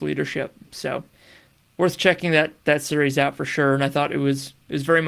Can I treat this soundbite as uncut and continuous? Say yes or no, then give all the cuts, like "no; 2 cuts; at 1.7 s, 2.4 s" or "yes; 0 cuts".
yes; 0 cuts